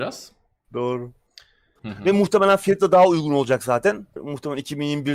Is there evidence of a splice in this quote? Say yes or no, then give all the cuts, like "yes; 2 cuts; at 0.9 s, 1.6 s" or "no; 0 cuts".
yes; 2 cuts; at 1.8 s, 4.2 s